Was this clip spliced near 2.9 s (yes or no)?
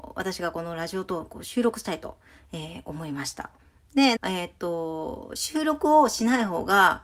no